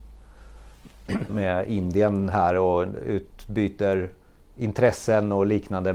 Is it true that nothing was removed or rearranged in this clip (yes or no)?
no